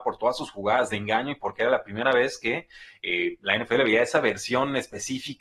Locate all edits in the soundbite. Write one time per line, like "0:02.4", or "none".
none